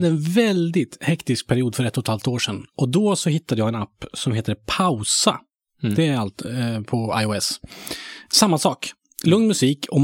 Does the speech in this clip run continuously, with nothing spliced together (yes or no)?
yes